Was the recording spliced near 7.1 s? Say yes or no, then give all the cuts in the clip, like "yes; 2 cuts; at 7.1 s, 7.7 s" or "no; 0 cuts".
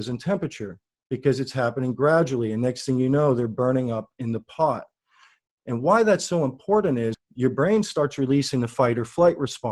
yes; 2 cuts; at 5.5 s, 7.1 s